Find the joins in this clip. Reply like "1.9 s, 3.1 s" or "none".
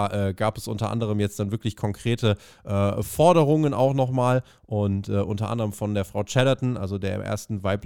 none